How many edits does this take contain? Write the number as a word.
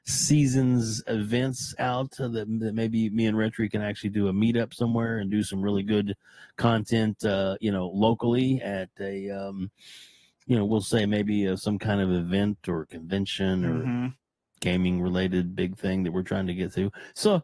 zero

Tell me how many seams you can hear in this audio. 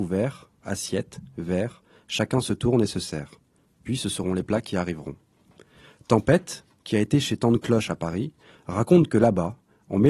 zero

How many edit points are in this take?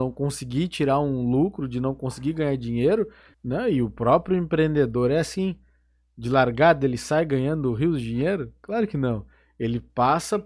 one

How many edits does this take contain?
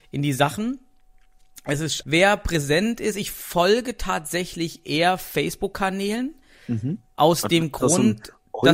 one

